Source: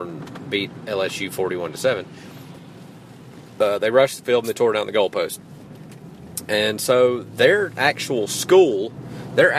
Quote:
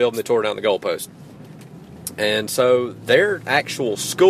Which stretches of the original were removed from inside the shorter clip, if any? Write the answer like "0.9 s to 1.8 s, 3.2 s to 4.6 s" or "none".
none